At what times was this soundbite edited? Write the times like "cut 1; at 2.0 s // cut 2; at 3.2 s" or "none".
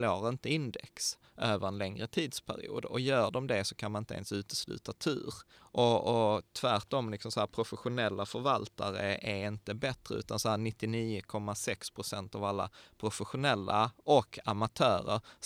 cut 1; at 5.6 s